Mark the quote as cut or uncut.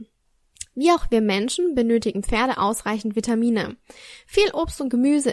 uncut